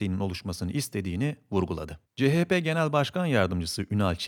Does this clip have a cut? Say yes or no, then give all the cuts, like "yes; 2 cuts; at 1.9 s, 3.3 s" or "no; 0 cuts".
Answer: no; 0 cuts